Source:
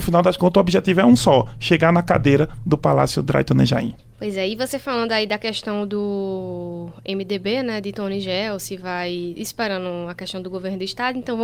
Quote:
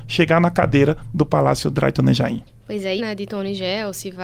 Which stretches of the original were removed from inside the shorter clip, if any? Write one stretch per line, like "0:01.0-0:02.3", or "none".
0:04.5-0:07.6